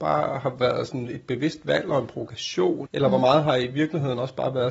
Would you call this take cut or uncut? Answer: cut